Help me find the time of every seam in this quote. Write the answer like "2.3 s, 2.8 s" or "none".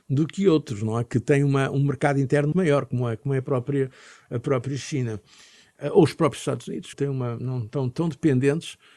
2.5 s, 6.9 s